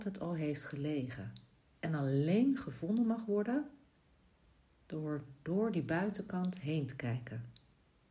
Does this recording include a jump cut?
no; 0 cuts

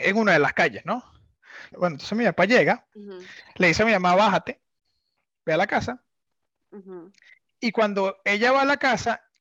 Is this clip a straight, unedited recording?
no; 2 cuts; at 1.7 s, 2.9 s

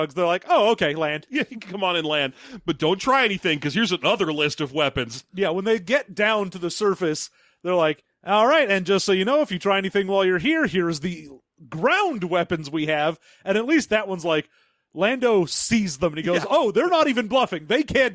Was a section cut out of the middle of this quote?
no; 0 cuts

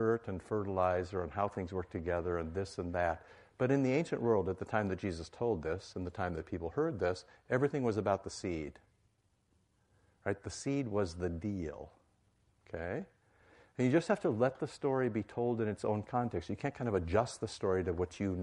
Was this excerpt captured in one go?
yes; 0 cuts

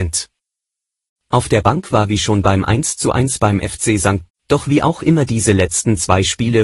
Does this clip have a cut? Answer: yes; 1 cut; at 4.3 s

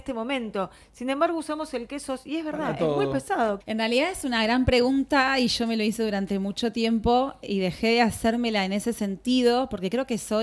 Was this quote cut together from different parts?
yes; 2 cuts; at 3.6 s, 7.4 s

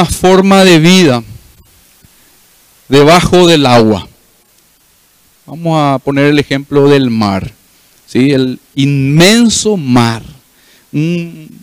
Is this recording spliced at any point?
no; 0 cuts

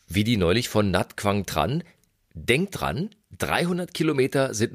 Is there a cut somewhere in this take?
no; 0 cuts

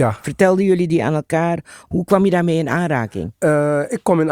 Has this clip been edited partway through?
no; 0 cuts

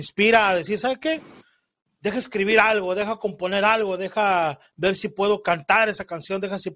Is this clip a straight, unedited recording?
yes; 0 cuts

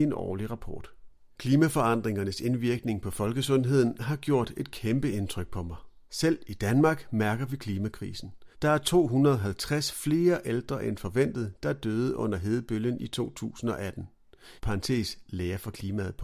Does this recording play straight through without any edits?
no; 2 cuts; at 8.5 s, 14.6 s

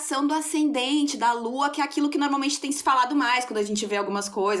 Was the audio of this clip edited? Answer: no; 0 cuts

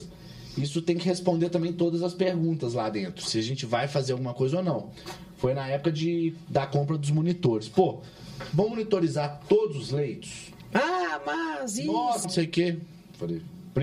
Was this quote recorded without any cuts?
no; 1 cut; at 12.2 s

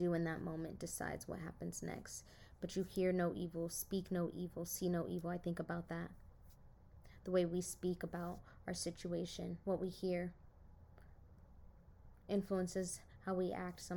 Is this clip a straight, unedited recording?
no; 1 cut; at 9.6 s

